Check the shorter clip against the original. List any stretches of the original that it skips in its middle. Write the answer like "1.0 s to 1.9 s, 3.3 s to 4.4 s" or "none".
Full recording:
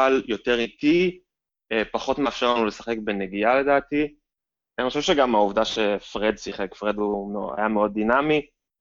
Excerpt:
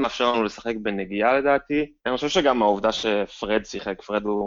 4.2 s to 4.7 s